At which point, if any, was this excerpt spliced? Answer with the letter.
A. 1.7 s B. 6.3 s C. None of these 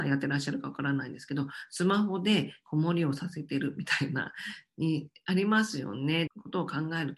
B